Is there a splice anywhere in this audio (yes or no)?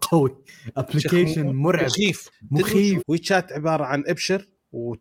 yes